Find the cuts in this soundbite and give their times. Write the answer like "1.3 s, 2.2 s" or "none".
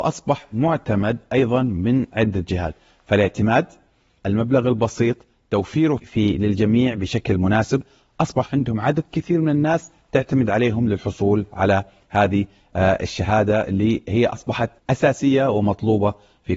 6.0 s, 14.8 s